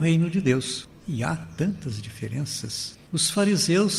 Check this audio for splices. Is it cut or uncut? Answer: cut